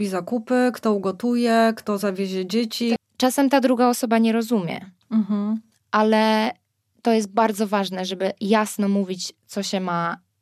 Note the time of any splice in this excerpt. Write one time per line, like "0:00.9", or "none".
0:03.0